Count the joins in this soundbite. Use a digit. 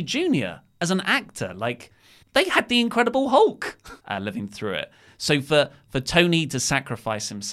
2